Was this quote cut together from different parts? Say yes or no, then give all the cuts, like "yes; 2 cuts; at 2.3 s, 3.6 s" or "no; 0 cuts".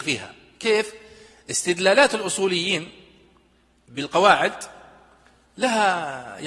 no; 0 cuts